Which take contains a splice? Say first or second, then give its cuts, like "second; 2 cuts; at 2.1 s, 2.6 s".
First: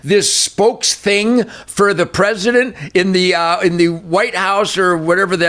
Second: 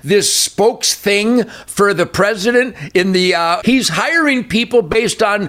second; 1 cut; at 3.6 s